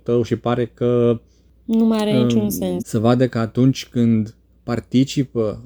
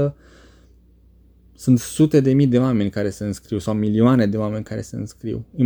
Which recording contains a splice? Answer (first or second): first